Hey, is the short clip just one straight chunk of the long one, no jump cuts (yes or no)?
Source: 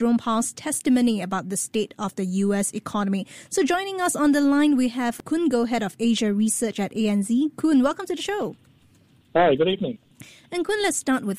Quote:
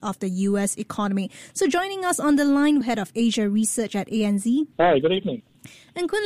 no